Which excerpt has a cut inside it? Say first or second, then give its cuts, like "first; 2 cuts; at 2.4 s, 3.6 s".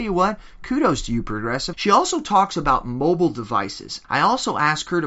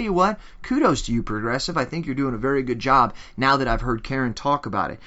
first; 2 cuts; at 1.7 s, 4.0 s